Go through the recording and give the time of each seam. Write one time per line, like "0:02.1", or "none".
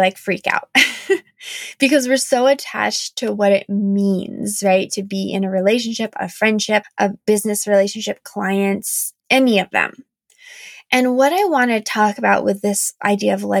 0:06.8
0:09.2